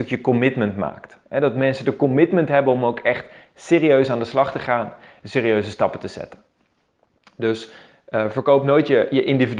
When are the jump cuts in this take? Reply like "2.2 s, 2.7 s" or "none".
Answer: none